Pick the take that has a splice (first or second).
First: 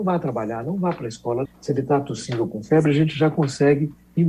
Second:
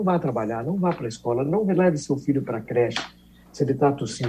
first